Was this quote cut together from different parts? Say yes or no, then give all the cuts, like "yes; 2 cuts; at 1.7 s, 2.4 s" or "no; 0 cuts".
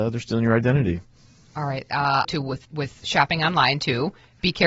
yes; 1 cut; at 2.2 s